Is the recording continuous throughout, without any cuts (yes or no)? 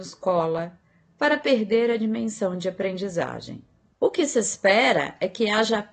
no